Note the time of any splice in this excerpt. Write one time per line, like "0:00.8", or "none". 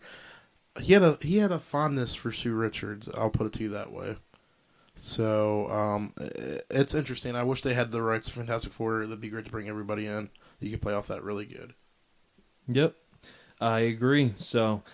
none